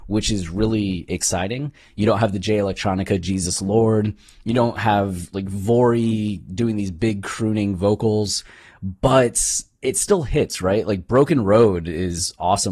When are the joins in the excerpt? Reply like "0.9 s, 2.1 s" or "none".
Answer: 1.8 s